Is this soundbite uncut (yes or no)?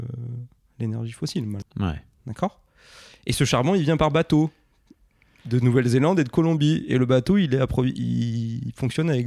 no